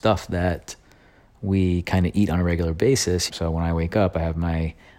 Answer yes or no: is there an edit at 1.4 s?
no